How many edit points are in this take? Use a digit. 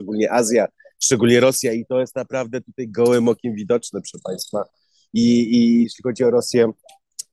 1